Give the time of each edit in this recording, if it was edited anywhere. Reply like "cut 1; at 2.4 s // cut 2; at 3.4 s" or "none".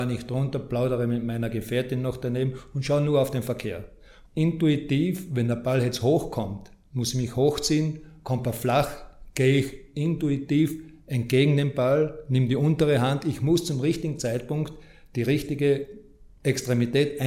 cut 1; at 4.2 s